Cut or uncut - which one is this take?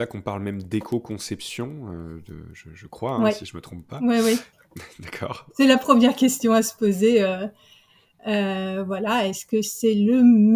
cut